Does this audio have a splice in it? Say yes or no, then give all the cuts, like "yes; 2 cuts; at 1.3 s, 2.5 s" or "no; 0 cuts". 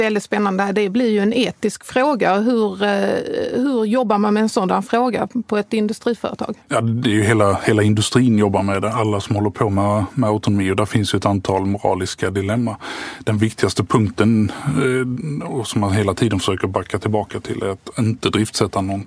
yes; 1 cut; at 6.6 s